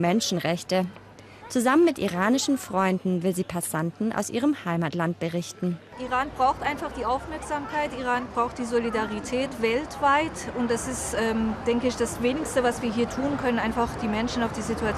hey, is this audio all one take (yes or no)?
yes